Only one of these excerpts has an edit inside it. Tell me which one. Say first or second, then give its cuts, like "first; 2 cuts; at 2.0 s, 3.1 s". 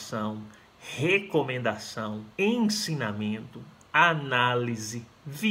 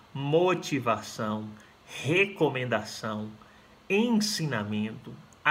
first; 1 cut; at 2.3 s